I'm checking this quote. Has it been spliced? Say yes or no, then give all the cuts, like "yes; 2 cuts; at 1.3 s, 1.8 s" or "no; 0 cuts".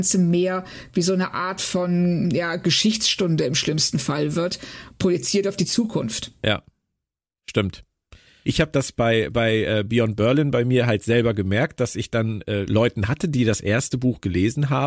yes; 2 cuts; at 8.4 s, 12.7 s